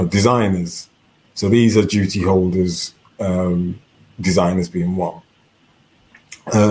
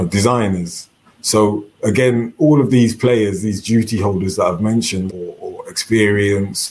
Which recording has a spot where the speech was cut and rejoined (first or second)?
second